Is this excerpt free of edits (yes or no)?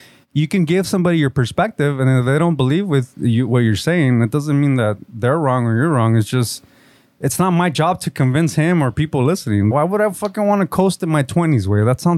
no